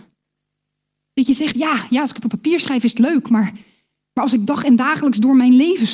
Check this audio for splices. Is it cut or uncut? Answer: uncut